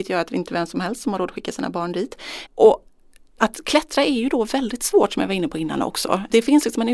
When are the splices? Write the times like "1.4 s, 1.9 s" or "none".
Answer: 2.5 s